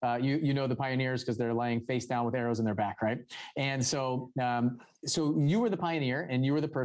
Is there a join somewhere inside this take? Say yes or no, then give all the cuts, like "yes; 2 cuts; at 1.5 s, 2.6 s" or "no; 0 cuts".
no; 0 cuts